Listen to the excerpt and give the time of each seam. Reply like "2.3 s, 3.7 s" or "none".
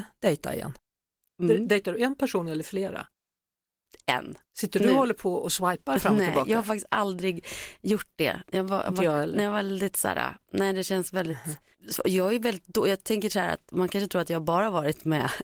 1.3 s, 4.4 s